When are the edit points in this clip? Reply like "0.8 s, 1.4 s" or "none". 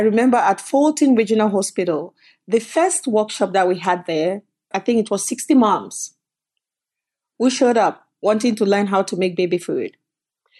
4.7 s